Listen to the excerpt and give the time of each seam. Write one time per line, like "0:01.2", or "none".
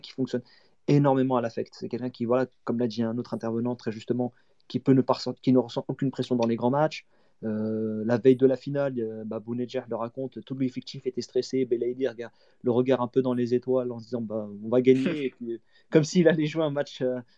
none

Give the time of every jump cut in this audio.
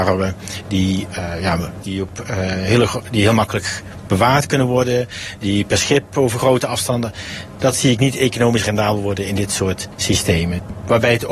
0:01.8

